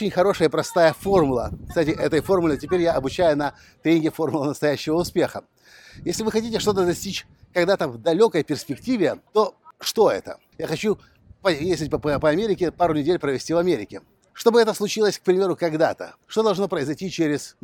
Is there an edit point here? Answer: yes; 2 cuts; at 9.3 s, 10.5 s

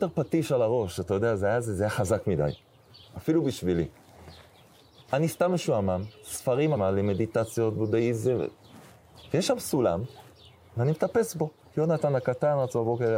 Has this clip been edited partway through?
yes; 1 cut; at 6.7 s

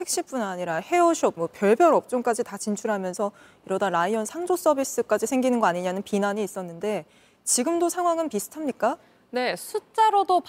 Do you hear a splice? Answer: yes; 1 cut; at 1.4 s

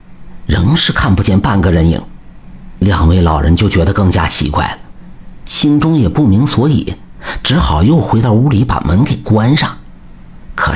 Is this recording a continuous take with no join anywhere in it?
yes; 0 cuts

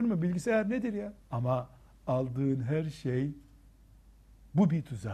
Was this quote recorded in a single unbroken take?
no; 1 cut; at 1.2 s

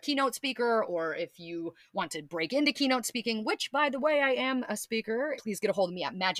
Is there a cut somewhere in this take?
yes; 1 cut; at 5.4 s

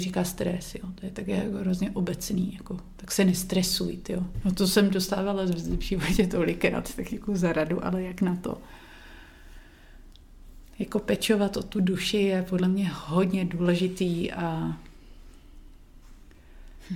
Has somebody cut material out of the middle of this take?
no; 0 cuts

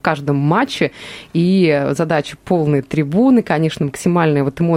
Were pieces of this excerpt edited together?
no; 0 cuts

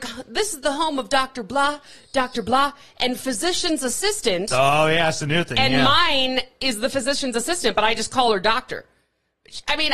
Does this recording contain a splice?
no; 0 cuts

